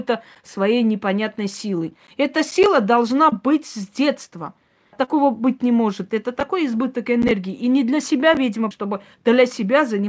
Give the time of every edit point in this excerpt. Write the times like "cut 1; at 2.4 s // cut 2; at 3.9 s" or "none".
cut 1; at 4.9 s // cut 2; at 8.7 s